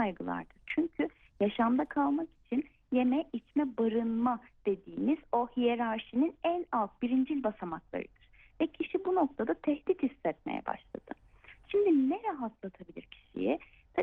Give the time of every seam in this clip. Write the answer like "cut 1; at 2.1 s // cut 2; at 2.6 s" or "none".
none